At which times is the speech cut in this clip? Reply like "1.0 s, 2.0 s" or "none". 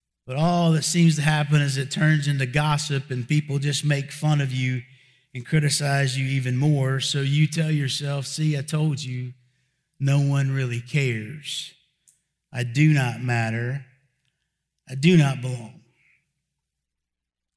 none

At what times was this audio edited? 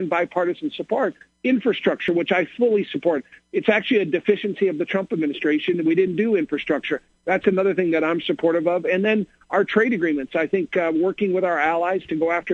none

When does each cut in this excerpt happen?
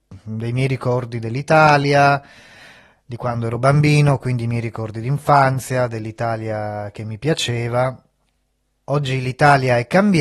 none

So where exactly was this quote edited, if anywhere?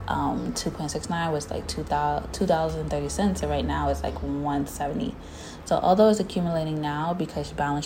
none

